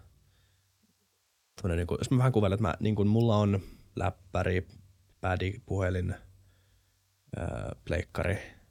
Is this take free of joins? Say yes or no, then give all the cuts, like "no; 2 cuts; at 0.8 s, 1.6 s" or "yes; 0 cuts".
yes; 0 cuts